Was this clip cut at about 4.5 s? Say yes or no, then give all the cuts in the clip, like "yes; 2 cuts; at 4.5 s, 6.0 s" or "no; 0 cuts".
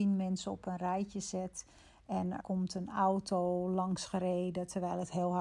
no; 1 cut; at 2.4 s